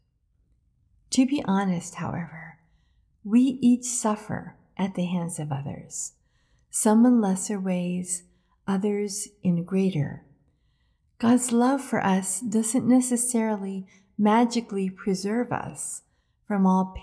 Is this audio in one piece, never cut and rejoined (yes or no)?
yes